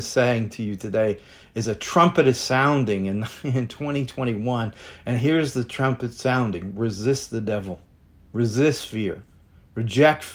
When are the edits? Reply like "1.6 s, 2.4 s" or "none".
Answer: none

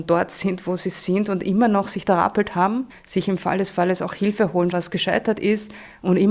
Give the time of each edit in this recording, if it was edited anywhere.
2.9 s, 4.7 s

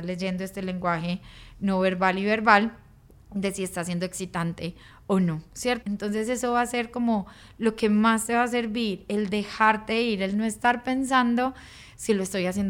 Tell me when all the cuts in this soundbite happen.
5.8 s

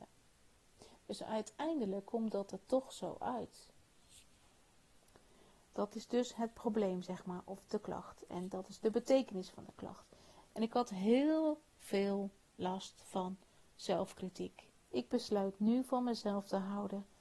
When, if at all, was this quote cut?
10.4 s, 14.8 s

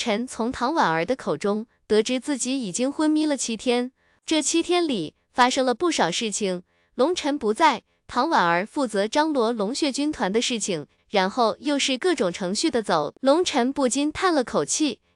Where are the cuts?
11.0 s, 13.1 s

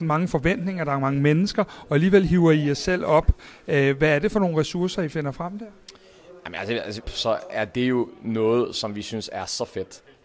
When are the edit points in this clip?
7.0 s

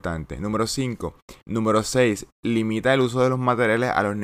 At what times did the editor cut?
1.4 s

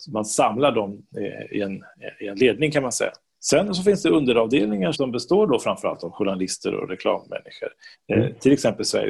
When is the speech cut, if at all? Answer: 4.9 s, 7.9 s

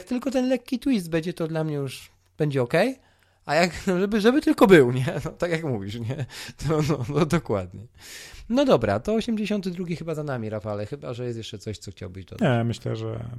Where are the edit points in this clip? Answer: none

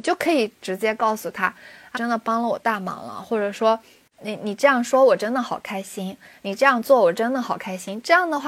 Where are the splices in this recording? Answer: 1.9 s

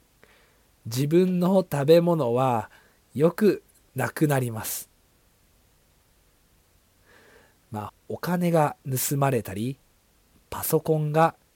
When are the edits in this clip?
7.9 s

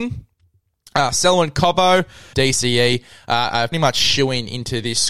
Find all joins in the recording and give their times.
2.3 s, 3.7 s

